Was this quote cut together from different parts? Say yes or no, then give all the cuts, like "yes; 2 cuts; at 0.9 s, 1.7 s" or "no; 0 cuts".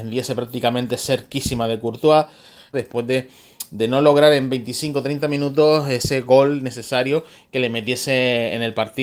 yes; 1 cut; at 2.7 s